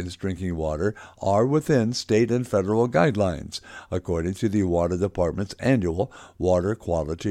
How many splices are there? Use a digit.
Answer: 0